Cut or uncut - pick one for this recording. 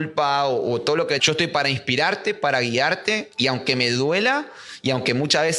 cut